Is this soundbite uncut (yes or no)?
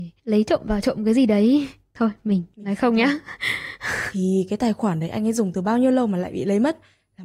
yes